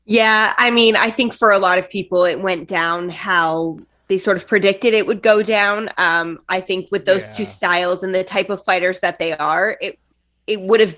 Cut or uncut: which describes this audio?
uncut